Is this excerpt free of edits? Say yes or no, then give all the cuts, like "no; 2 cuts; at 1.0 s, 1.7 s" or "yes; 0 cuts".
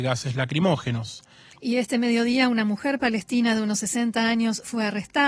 no; 1 cut; at 1.5 s